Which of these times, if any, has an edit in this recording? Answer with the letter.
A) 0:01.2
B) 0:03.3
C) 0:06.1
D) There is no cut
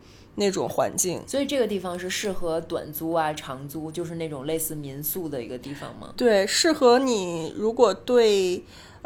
D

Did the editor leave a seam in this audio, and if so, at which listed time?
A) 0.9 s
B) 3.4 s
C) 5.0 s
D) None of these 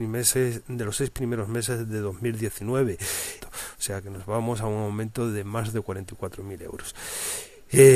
B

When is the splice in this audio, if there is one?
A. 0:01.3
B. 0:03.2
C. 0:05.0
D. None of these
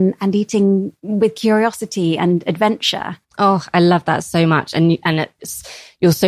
B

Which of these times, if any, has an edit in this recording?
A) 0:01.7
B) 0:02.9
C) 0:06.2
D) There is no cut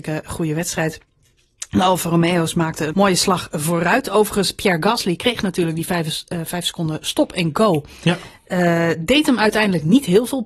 B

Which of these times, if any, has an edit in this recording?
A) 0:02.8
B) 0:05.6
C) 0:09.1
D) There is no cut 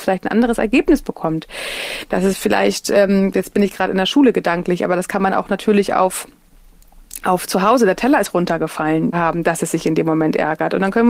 C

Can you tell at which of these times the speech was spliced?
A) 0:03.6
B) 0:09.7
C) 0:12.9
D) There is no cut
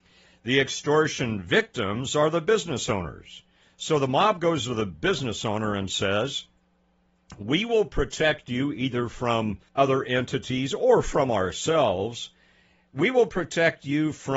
B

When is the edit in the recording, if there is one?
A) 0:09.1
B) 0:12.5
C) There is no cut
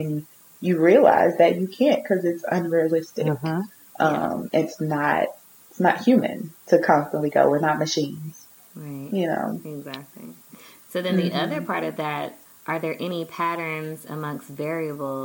B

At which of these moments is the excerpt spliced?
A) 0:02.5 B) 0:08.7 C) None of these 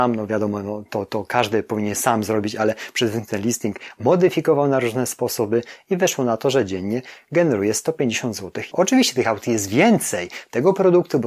B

